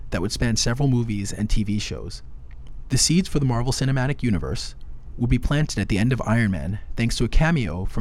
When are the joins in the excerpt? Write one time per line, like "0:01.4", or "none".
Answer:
0:05.1